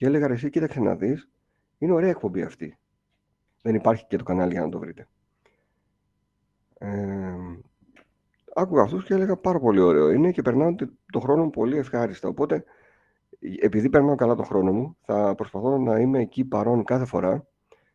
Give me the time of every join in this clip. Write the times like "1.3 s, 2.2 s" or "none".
3.5 s